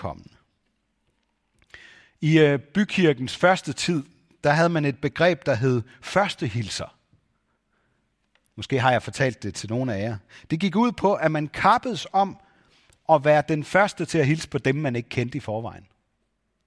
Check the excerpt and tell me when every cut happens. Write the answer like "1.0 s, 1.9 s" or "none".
none